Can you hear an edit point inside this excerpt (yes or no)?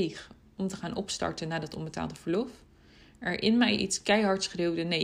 no